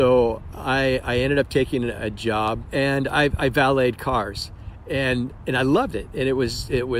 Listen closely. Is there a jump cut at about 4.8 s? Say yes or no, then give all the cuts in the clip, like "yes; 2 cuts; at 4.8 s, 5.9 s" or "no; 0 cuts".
no; 1 cut; at 2.6 s